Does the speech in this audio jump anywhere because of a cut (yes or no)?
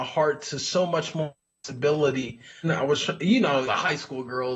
yes